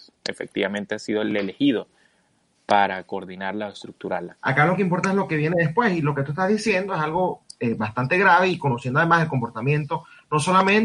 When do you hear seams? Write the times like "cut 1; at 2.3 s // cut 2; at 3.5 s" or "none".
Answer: cut 1; at 4.4 s